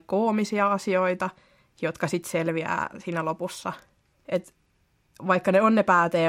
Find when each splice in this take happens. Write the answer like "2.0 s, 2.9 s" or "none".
4.1 s